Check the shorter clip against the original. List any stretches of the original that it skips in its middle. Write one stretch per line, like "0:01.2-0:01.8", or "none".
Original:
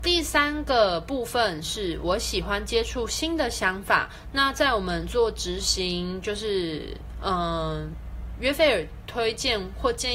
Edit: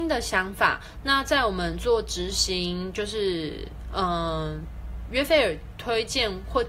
none

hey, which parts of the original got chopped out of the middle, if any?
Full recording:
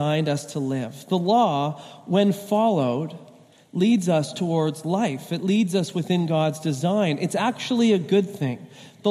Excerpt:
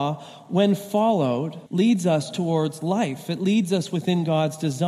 0:03.2-0:03.7

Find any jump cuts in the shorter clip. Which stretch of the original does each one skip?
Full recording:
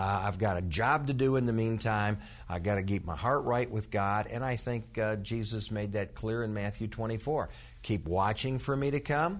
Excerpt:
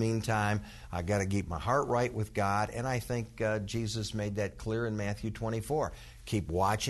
none

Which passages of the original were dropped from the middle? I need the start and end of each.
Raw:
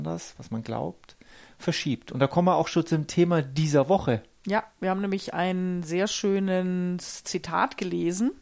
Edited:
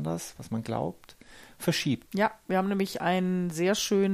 0:02.1-0:04.4

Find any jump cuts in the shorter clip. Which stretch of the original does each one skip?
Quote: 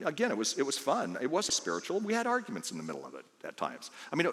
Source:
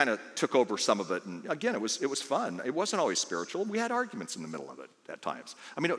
0:02.9-0:03.1

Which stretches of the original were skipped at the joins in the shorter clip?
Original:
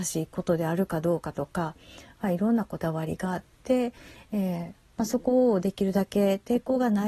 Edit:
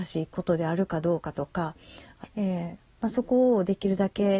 0:02.2-0:04.2

